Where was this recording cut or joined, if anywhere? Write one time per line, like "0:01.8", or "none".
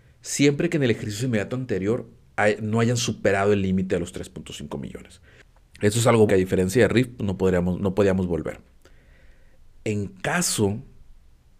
0:06.3